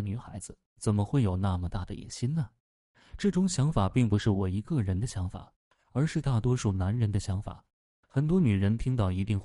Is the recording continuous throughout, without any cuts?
yes; 0 cuts

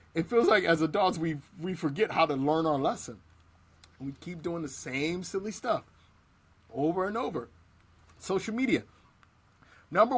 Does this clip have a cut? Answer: no; 0 cuts

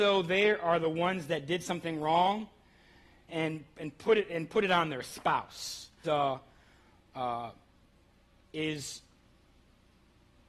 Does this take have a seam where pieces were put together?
yes; 2 cuts; at 3.3 s, 6.0 s

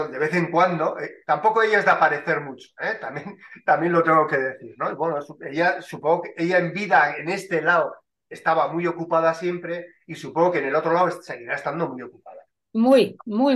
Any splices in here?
no; 0 cuts

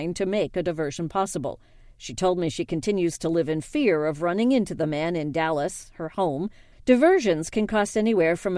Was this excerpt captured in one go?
no; 2 cuts; at 1.9 s, 6.7 s

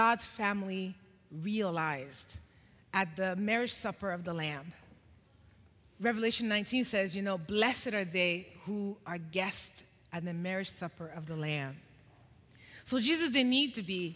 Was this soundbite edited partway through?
no; 0 cuts

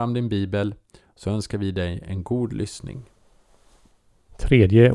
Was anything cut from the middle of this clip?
no; 0 cuts

